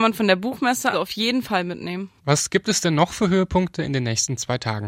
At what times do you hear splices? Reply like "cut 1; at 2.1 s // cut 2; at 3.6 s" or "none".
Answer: cut 1; at 0.9 s // cut 2; at 2.2 s